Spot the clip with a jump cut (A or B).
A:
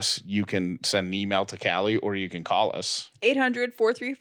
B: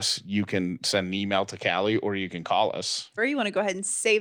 B